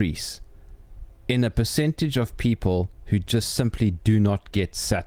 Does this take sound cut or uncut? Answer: uncut